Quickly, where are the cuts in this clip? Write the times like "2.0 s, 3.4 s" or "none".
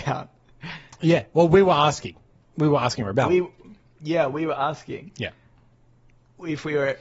none